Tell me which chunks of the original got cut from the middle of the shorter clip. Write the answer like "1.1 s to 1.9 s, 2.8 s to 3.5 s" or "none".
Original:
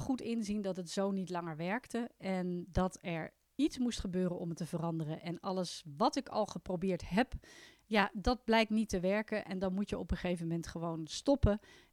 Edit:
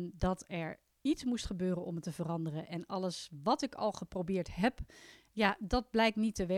none